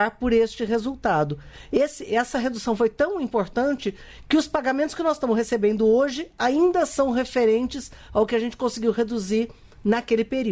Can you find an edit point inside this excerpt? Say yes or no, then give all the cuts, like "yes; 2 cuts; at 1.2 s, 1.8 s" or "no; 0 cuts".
no; 0 cuts